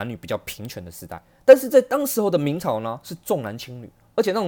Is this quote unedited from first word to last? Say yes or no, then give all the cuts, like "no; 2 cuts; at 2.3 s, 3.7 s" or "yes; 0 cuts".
yes; 0 cuts